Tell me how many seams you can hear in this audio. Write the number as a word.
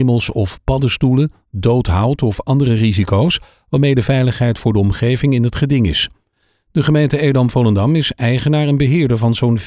zero